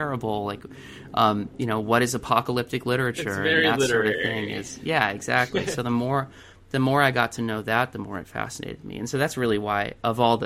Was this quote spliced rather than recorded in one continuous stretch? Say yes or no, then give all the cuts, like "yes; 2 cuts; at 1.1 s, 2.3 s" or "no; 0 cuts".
no; 0 cuts